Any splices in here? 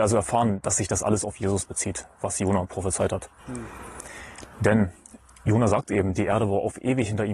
no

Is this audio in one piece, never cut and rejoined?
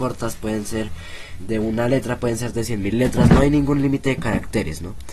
no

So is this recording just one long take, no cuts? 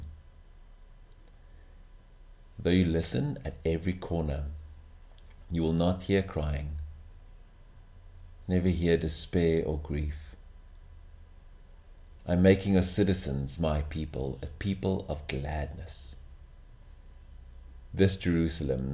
no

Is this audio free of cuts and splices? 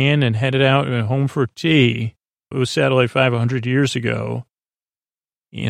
no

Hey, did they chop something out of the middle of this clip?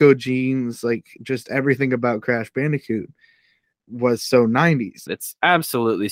yes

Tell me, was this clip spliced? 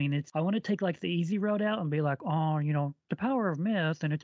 no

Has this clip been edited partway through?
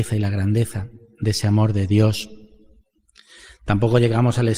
no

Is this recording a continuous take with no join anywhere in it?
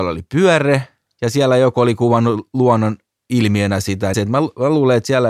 no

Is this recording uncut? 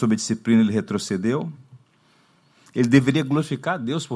yes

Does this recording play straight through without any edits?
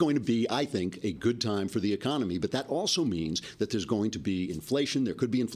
yes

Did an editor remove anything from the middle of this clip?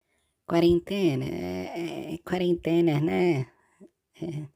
no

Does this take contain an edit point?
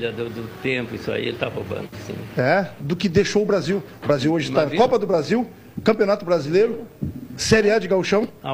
yes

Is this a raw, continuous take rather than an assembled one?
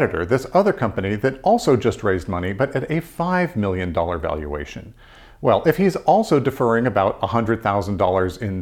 yes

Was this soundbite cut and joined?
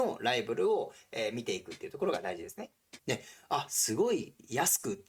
yes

